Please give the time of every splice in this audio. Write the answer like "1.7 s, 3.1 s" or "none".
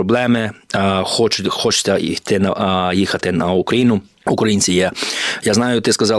4.1 s